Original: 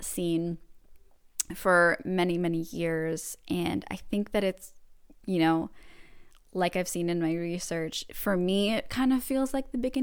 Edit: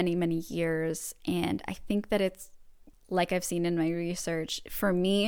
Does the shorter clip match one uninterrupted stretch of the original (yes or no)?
no